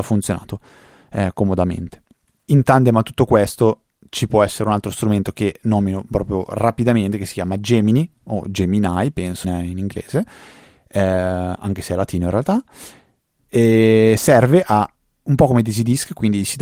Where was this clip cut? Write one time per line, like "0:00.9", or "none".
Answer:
0:09.4